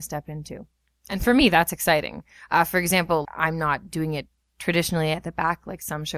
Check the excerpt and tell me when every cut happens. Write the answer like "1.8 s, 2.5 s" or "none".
3.3 s